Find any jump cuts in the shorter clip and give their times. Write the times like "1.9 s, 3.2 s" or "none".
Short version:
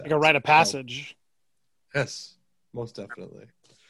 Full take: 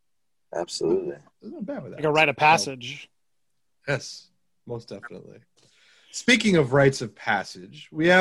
none